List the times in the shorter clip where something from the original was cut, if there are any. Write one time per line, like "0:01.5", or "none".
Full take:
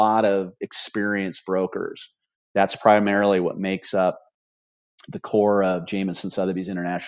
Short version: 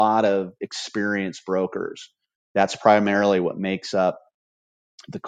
none